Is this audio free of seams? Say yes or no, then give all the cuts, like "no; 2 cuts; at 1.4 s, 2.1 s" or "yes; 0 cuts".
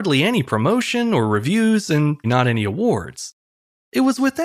no; 1 cut; at 2.2 s